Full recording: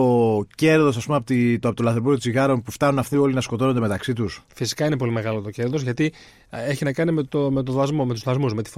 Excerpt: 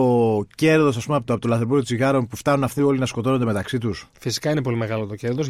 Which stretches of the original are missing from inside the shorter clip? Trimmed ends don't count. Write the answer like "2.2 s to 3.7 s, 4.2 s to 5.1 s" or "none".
1.2 s to 1.6 s